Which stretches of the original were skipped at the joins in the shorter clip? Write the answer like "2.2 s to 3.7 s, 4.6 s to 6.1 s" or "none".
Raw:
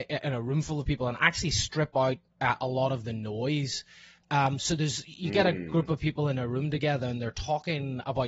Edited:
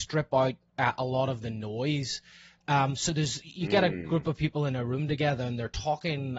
none

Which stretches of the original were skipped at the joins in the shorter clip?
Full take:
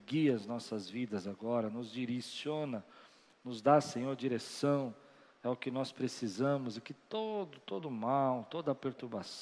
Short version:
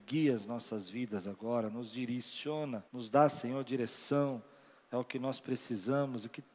2.9 s to 3.4 s

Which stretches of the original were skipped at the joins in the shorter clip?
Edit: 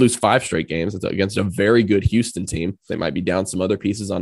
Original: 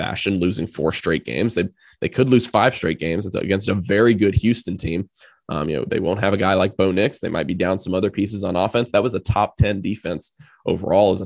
5.2 s to 7.2 s

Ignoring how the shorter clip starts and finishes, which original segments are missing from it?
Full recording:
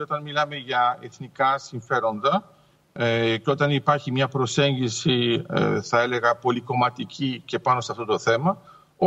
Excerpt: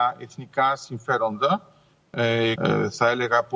3.4 s to 5.5 s

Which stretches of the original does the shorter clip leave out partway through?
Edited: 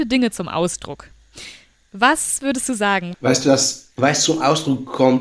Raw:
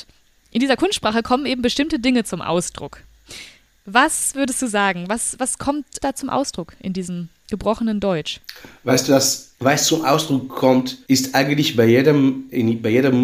5.1 s to 8.8 s

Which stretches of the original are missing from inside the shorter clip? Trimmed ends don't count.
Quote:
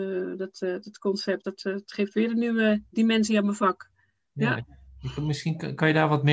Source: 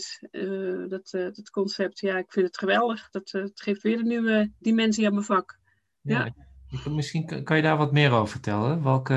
1.9 s to 3.1 s

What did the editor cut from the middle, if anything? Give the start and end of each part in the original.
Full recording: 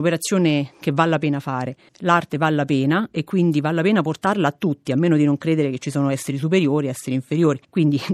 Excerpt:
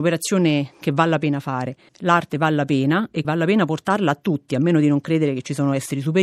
3.2 s to 3.6 s

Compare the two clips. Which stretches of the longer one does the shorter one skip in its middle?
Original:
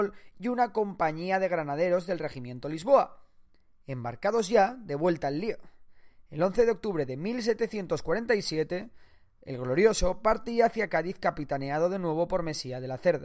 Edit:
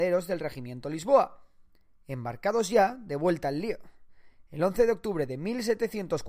none

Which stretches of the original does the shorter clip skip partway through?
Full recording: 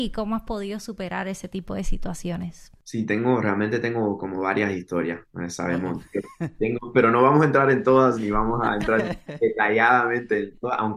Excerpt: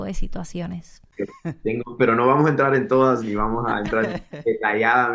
2.8 s to 6.1 s

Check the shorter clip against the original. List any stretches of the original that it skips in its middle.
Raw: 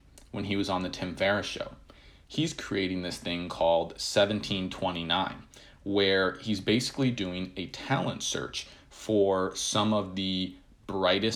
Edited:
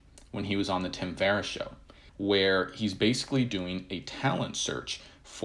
2.1 s to 5.7 s

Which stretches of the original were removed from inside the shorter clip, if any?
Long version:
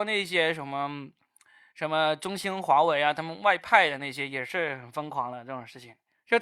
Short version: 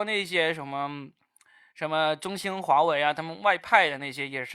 none

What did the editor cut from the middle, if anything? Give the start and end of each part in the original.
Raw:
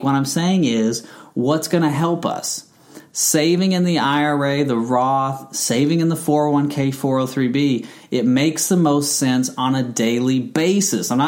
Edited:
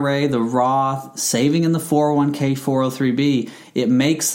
none

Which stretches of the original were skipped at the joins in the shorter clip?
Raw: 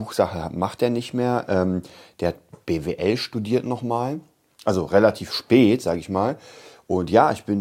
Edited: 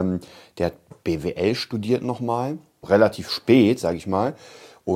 4.4 s to 4.9 s

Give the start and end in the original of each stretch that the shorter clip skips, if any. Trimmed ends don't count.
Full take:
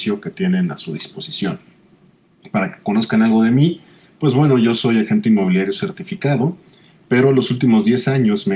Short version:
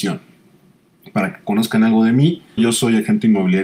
4.0 s to 4.6 s

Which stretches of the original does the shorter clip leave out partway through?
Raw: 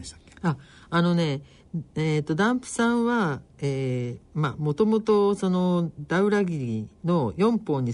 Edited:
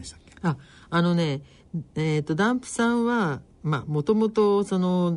3.5 s to 4.2 s

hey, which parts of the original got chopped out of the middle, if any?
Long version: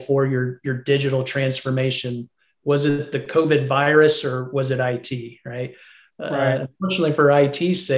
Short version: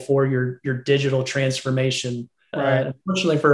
2.5 s to 6.3 s

